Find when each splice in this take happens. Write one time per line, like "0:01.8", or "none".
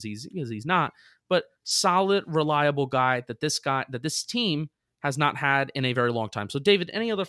none

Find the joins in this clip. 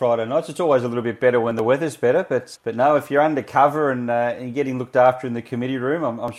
0:02.6

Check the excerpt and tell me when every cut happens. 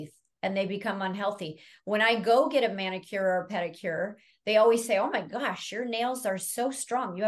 none

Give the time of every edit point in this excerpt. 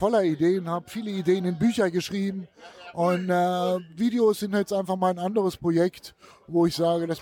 none

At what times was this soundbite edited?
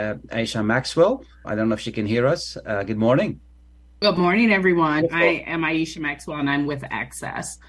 0:01.4
0:05.0

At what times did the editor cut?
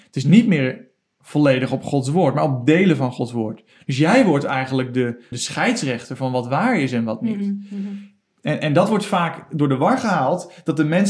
0:05.3

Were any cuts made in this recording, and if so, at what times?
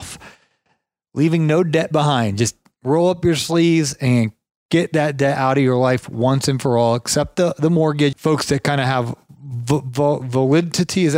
0:08.1

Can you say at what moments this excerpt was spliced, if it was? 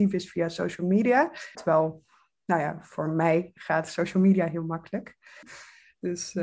0:01.5
0:05.4

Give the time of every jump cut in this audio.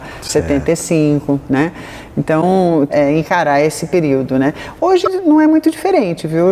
0:02.9

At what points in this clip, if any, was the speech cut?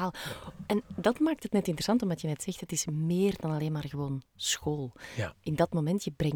none

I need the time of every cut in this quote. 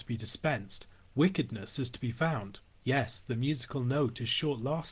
0:02.7

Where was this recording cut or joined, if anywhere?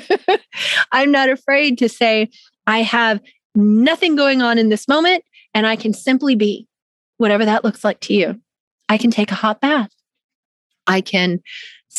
none

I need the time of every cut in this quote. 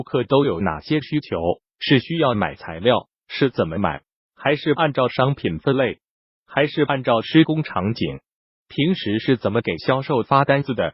0:04.2

